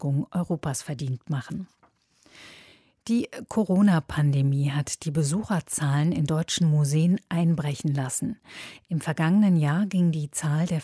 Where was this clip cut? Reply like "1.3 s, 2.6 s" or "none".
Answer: none